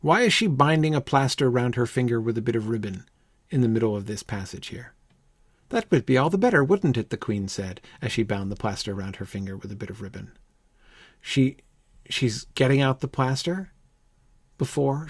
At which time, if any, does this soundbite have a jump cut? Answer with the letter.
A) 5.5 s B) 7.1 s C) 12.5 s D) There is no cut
C